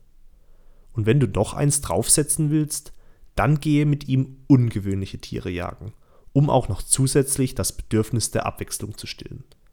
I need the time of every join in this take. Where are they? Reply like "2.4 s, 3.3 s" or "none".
none